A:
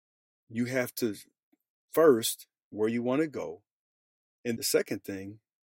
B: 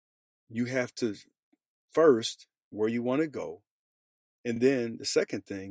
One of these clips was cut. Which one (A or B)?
A